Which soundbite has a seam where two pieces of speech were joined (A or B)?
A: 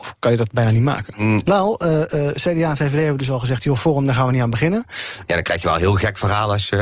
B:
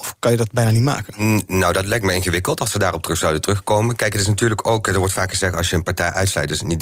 A